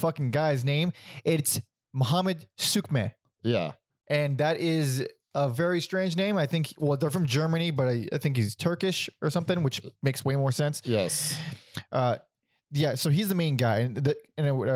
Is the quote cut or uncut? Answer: uncut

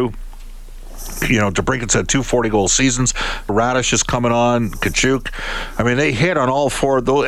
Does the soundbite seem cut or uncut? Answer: cut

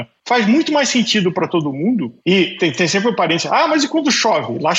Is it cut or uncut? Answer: uncut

